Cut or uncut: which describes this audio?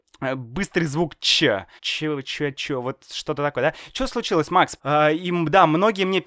cut